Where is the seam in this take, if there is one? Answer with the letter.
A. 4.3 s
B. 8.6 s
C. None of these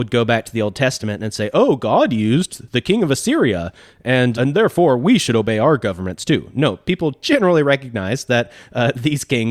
A